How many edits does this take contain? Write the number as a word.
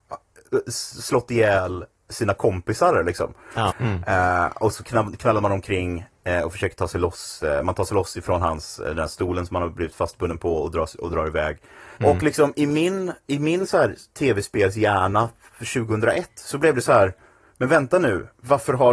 two